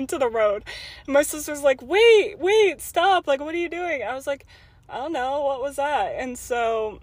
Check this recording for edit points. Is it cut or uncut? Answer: uncut